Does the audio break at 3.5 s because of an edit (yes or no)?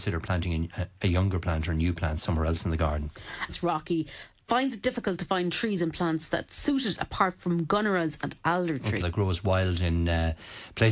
yes